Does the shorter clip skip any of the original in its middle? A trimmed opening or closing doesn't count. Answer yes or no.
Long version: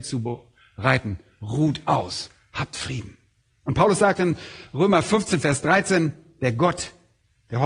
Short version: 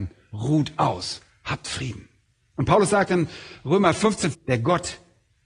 yes